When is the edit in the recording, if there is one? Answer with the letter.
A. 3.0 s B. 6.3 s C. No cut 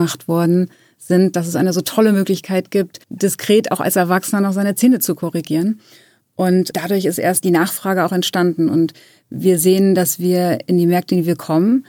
A